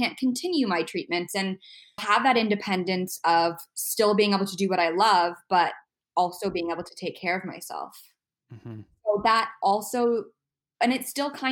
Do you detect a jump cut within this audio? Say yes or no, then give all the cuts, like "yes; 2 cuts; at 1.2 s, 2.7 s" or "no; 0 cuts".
yes; 1 cut; at 2.0 s